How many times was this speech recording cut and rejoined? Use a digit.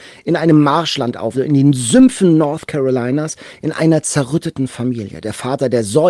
1